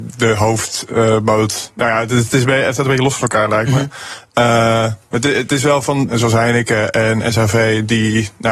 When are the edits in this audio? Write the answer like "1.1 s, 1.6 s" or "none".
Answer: 6.1 s